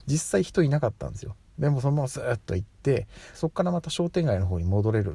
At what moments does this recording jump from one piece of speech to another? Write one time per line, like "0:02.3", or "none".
0:03.3